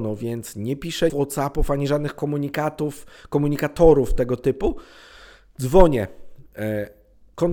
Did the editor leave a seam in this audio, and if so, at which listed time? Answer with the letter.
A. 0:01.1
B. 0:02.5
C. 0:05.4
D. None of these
A